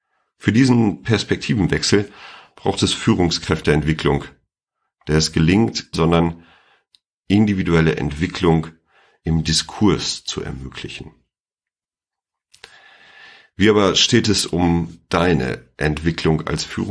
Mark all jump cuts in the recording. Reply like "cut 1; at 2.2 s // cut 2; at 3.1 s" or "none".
cut 1; at 5.9 s